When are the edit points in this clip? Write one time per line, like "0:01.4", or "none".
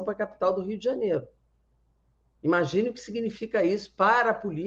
none